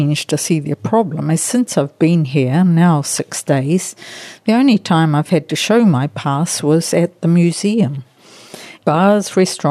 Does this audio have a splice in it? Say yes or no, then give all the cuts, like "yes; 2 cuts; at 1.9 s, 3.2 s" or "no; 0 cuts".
yes; 1 cut; at 8.8 s